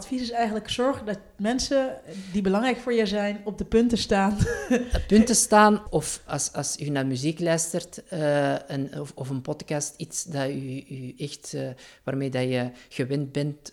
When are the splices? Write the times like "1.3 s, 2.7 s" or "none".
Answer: 5.9 s

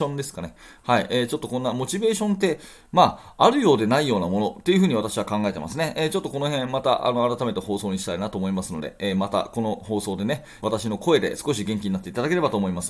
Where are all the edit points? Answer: 10.6 s

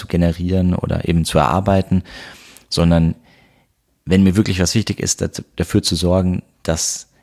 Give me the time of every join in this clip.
none

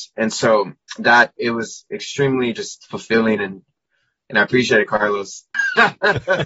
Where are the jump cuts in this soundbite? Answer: 5.5 s

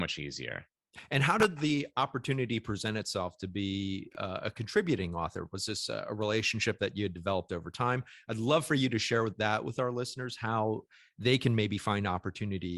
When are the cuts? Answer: none

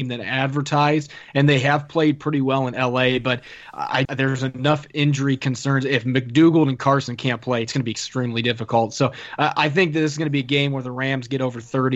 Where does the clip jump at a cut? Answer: 4.1 s

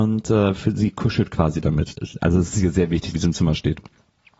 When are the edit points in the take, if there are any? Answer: 1.9 s, 3.1 s

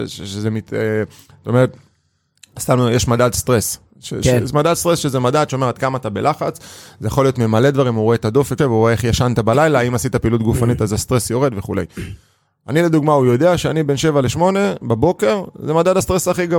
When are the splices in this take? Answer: 8.6 s

